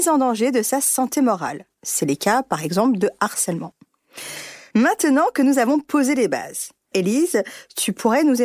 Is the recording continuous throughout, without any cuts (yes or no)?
no